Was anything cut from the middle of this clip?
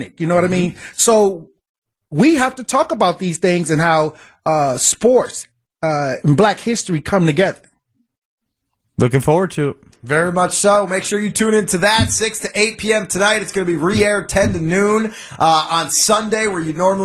no; 0 cuts

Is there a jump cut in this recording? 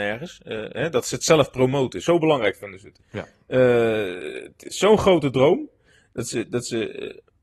no; 0 cuts

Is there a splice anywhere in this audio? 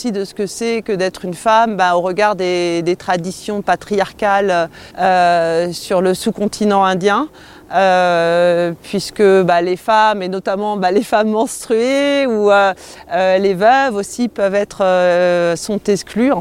yes; 1 cut; at 4.9 s

